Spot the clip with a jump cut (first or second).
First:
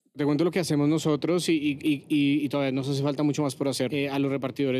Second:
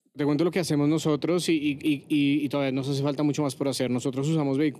first